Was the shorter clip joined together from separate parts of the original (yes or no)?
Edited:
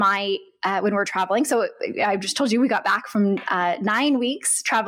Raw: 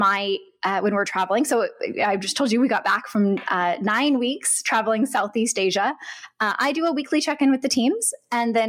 no